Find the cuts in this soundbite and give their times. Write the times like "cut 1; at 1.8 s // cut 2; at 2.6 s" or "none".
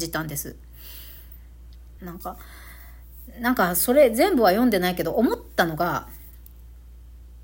cut 1; at 2.0 s